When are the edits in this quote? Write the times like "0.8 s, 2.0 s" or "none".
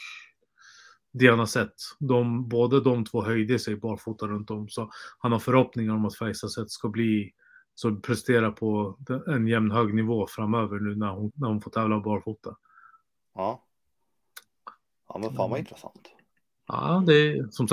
11.3 s